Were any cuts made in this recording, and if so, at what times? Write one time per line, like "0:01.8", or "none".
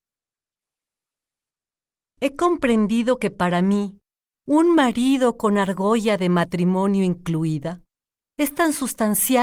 none